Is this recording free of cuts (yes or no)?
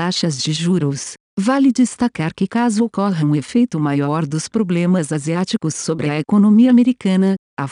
yes